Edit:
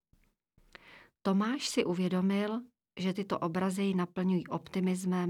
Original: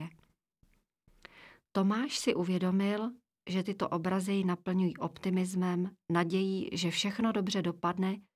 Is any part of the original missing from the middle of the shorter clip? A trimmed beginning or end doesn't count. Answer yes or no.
no